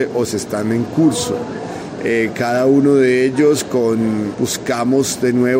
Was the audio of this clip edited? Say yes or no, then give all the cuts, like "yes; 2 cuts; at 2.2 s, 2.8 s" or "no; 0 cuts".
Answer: yes; 2 cuts; at 2.0 s, 4.3 s